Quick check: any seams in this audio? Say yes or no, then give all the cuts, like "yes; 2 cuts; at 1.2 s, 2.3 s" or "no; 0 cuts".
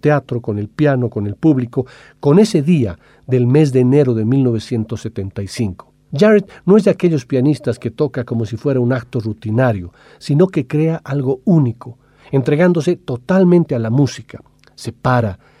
no; 0 cuts